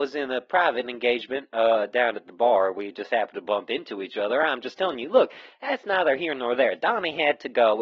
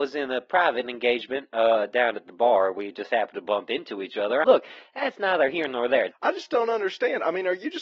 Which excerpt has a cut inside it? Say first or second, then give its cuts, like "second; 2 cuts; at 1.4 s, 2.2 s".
second; 2 cuts; at 4.4 s, 6.1 s